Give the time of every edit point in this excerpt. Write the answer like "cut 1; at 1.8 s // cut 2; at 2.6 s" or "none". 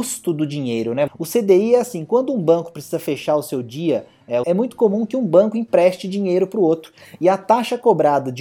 cut 1; at 1.1 s // cut 2; at 4.4 s